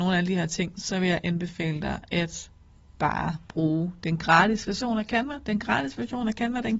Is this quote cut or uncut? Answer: uncut